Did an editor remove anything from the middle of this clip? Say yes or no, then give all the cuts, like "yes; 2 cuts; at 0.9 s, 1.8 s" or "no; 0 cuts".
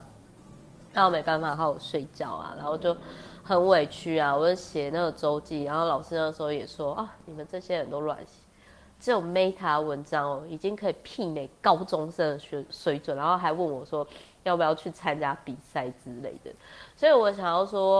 no; 0 cuts